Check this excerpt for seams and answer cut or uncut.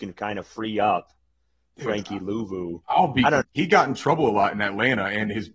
cut